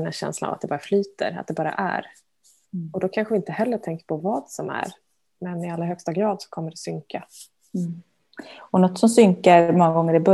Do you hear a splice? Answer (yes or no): no